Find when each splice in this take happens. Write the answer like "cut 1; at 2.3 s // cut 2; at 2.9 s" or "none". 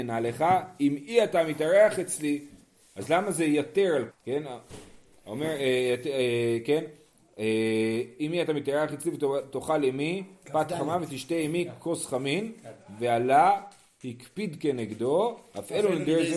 cut 1; at 4.1 s